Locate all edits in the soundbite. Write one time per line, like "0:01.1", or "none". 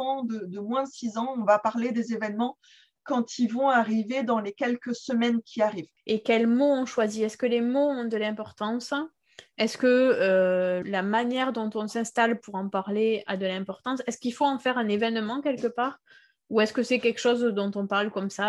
0:05.9
0:10.8